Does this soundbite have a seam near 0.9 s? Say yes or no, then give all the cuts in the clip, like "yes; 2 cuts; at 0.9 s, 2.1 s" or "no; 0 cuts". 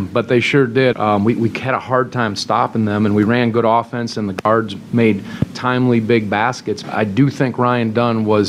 yes; 2 cuts; at 0.9 s, 6.8 s